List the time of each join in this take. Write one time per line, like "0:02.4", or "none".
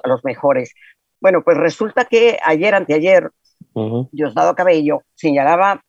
none